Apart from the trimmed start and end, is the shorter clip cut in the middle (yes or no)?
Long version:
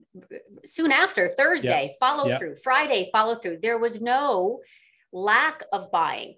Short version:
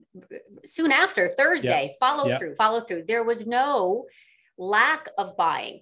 yes